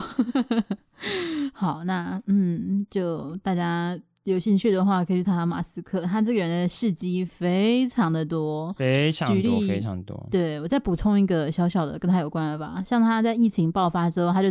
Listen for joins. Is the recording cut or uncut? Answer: uncut